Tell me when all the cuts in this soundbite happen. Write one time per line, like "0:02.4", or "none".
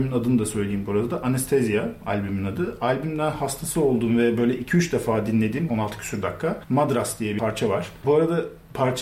0:05.7
0:08.0